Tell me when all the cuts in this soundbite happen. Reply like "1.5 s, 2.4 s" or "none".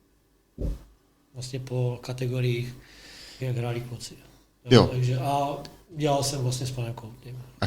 3.4 s

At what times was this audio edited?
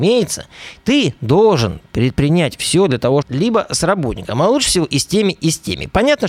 3.2 s

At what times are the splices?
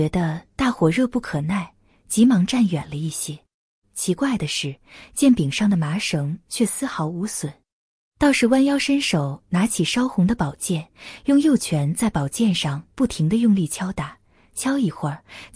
3.8 s

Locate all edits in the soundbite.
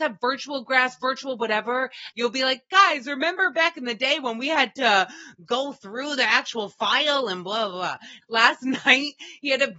2.1 s, 8.2 s

